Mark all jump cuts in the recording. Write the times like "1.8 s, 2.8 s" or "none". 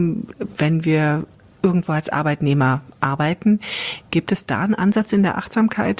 4.0 s